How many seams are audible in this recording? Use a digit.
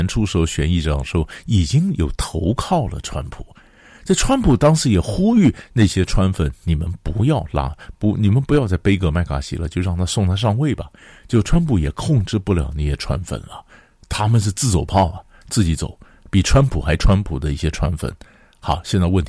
0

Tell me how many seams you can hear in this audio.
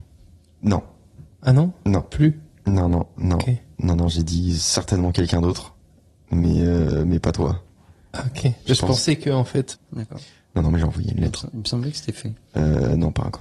1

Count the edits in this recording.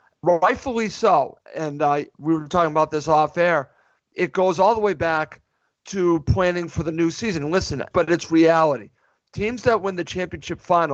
2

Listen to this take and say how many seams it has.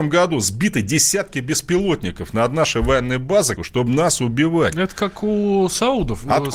1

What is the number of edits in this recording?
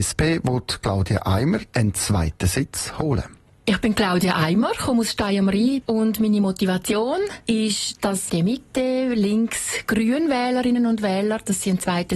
1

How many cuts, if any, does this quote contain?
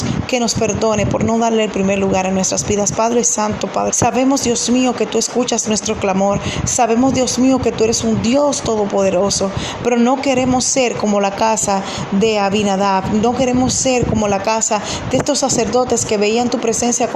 1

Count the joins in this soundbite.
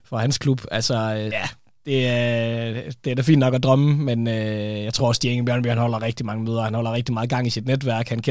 1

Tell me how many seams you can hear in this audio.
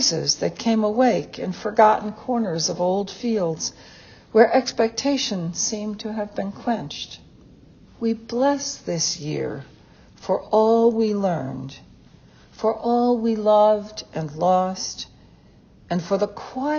1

